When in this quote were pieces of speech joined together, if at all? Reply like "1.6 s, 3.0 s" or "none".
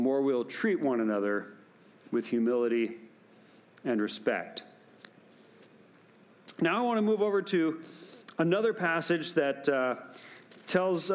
none